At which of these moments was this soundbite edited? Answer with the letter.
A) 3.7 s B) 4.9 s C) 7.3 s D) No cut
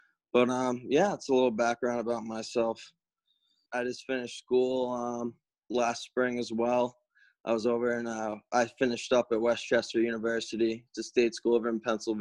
A